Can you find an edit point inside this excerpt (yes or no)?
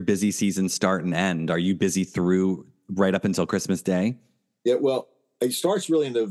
no